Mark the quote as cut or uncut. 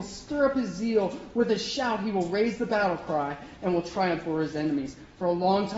uncut